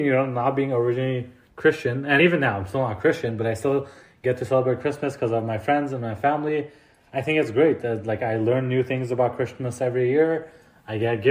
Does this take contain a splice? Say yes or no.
no